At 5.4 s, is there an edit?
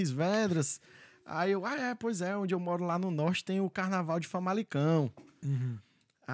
yes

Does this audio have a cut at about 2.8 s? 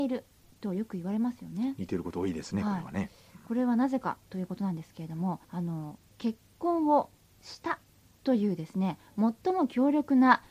no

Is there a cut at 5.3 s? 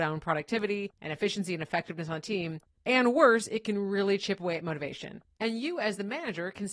yes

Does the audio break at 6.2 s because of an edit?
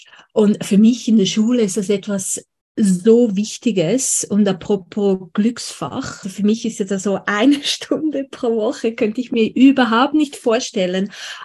yes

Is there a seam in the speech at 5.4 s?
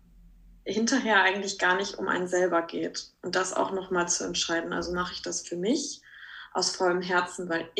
yes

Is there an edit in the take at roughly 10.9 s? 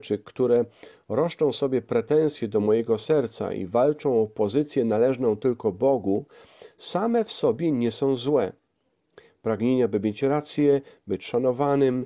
no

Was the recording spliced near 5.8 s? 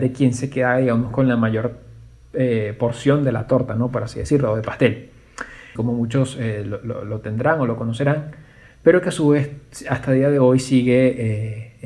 yes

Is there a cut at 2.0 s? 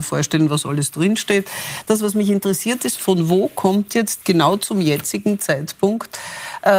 no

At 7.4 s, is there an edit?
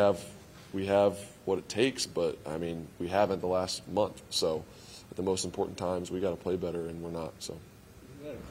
no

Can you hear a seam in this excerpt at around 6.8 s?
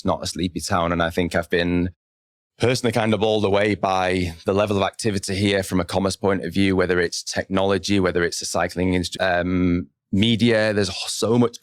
no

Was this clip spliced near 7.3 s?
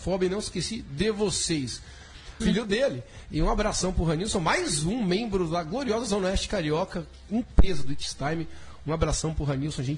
yes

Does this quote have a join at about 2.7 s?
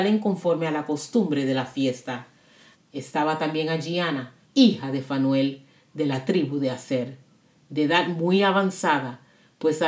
yes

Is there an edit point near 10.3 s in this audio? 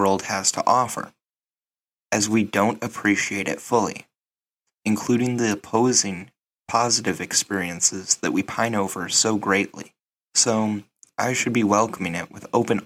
yes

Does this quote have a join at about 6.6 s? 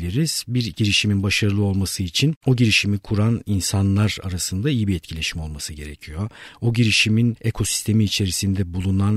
no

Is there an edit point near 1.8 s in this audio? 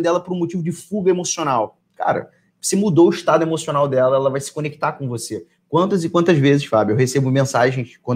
yes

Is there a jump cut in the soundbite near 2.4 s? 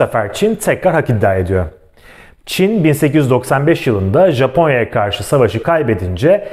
yes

